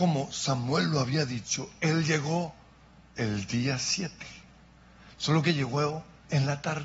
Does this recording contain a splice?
no; 0 cuts

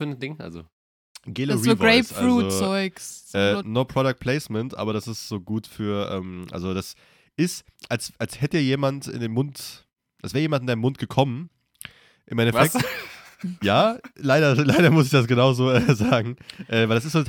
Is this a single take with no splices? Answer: no; 1 cut; at 3.6 s

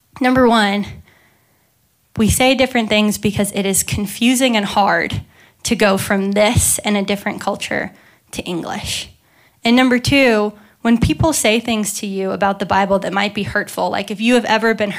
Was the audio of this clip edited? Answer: no; 0 cuts

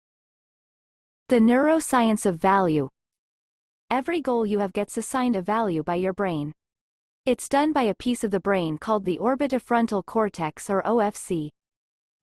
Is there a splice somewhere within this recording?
no; 0 cuts

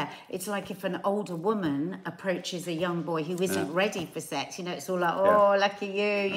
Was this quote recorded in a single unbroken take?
yes; 0 cuts

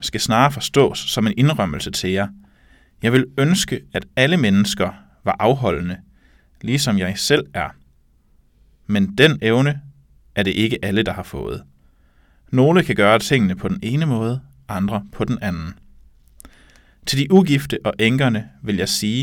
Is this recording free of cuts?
yes; 0 cuts

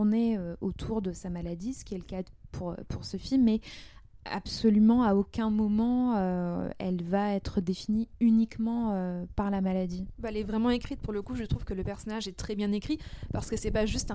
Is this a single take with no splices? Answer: yes; 0 cuts

